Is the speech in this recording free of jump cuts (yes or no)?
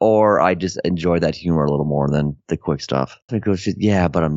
no